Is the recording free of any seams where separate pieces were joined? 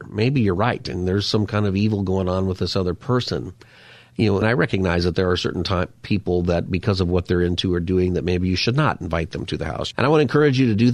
no; 2 cuts; at 4.4 s, 9.9 s

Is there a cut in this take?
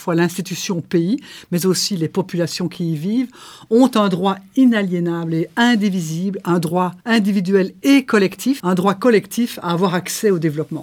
yes; 2 cuts; at 7.0 s, 8.6 s

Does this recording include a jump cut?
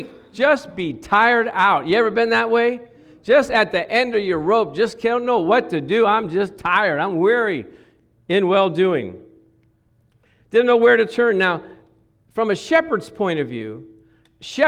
no; 0 cuts

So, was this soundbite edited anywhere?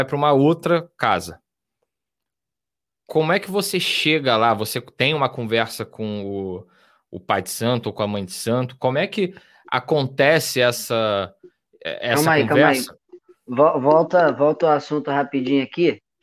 no; 0 cuts

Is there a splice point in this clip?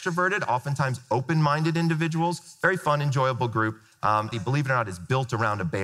yes; 1 cut; at 4.3 s

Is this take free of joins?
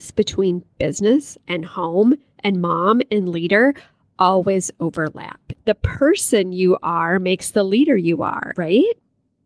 no; 2 cuts; at 5.5 s, 8.5 s

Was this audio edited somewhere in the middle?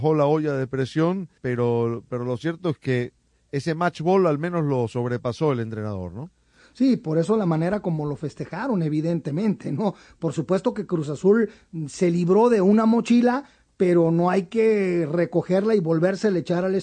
yes; 1 cut; at 1.4 s

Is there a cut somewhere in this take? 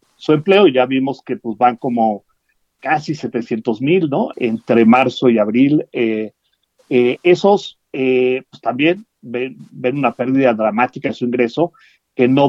yes; 1 cut; at 4.3 s

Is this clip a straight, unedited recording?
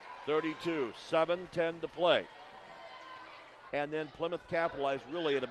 no; 1 cut; at 3.7 s

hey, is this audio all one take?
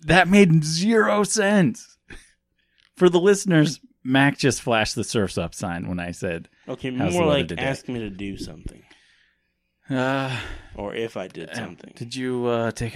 yes; 0 cuts

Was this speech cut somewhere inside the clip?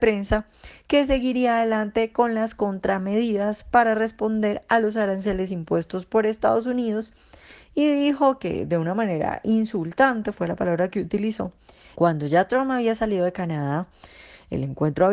yes; 1 cut; at 11.9 s

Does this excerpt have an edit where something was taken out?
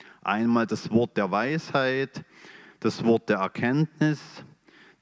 no; 0 cuts

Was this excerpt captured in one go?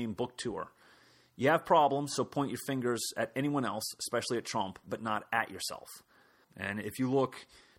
no; 1 cut; at 6.4 s

